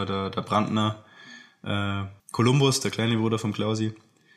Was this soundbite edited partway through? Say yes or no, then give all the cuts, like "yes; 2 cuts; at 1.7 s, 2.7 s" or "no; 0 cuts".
yes; 1 cut; at 2.2 s